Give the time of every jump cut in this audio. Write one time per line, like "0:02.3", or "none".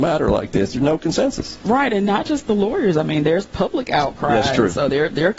none